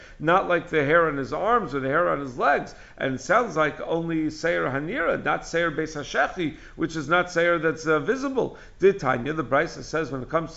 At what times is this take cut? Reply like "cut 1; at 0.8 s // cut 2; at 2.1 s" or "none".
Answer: none